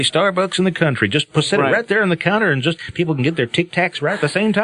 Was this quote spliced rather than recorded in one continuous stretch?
no; 0 cuts

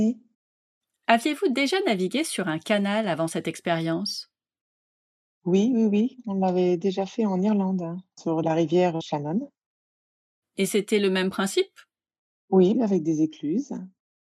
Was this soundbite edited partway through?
yes; 1 cut; at 12.7 s

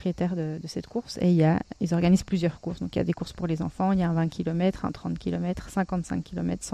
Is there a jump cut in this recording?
no; 0 cuts

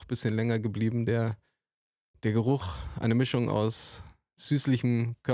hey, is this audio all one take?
yes; 0 cuts

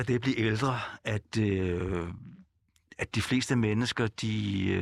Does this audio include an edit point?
no; 0 cuts

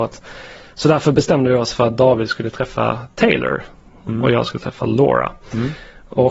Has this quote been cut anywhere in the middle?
no; 0 cuts

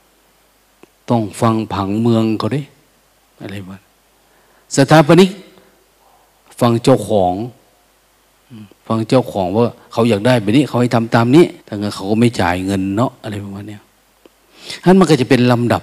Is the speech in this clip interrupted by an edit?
yes; 1 cut; at 11.6 s

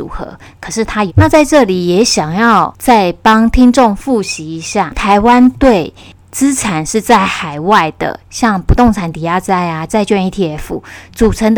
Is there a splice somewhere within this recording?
yes; 1 cut; at 1.1 s

